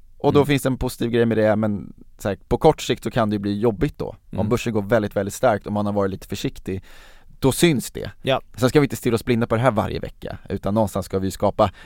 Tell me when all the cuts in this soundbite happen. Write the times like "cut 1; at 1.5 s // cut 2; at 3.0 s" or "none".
none